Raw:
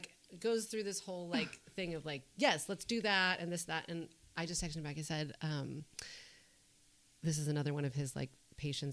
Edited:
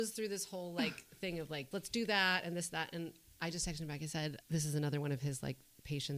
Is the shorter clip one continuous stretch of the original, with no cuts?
no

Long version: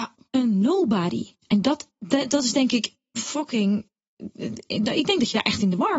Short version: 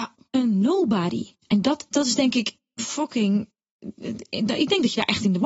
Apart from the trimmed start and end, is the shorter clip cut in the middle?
yes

